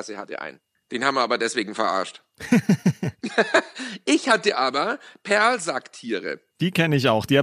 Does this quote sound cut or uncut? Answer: uncut